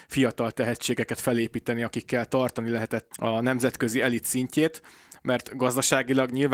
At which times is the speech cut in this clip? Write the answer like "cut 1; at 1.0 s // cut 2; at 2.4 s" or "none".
cut 1; at 3.1 s